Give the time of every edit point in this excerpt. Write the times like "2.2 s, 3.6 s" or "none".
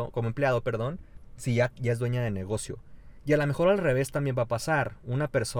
none

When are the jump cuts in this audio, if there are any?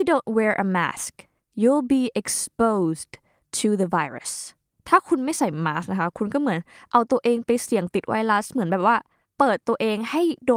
none

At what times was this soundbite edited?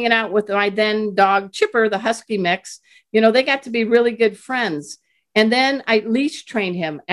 none

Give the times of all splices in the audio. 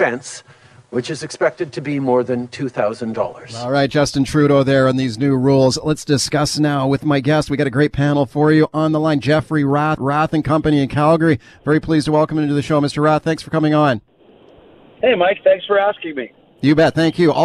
10.0 s

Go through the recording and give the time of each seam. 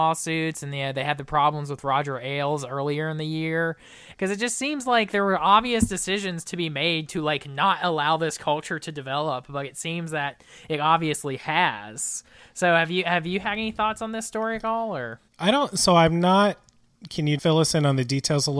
4.1 s, 15.3 s, 17.4 s

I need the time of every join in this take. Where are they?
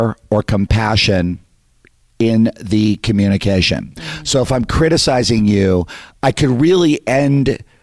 none

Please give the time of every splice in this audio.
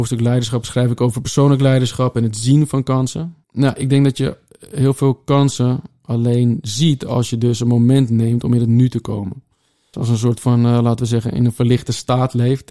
3.4 s, 9.9 s

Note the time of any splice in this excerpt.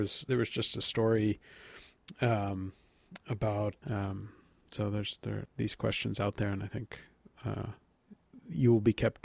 3.8 s, 5.5 s

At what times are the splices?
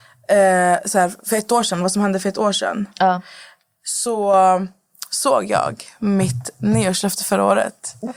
none

